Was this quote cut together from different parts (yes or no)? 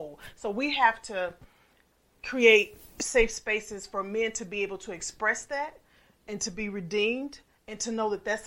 no